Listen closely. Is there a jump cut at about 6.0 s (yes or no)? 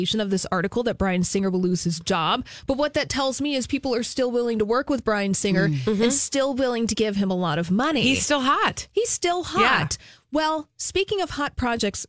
no